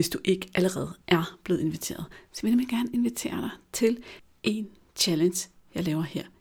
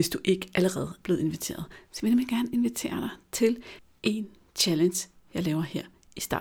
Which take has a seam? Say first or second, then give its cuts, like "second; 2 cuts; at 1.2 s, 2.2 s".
second; 1 cut; at 1.0 s